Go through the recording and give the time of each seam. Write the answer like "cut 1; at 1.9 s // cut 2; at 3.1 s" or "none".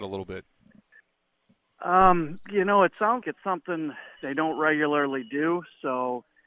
cut 1; at 3.2 s